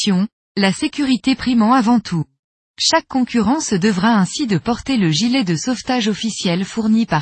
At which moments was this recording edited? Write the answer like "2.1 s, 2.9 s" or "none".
2.7 s